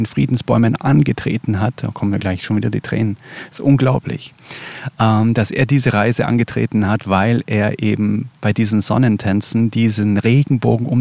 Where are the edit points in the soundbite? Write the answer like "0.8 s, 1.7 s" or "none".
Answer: none